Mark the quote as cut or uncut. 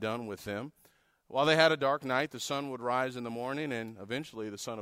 uncut